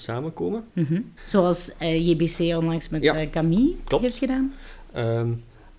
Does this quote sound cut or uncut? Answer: cut